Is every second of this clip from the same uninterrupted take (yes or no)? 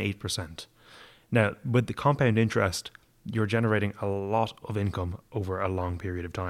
yes